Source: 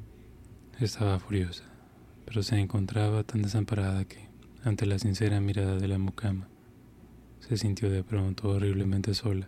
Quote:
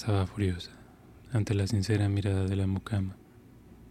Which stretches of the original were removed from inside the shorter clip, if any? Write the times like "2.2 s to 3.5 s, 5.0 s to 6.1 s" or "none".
2.2 s to 4.6 s